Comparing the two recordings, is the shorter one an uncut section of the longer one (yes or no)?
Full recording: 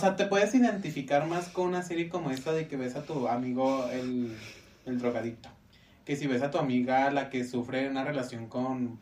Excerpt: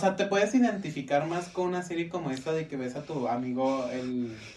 yes